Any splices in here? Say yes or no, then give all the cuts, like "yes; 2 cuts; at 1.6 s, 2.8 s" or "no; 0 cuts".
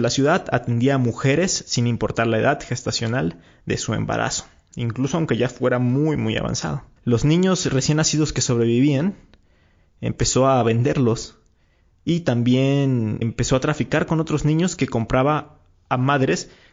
yes; 2 cuts; at 7.0 s, 13.2 s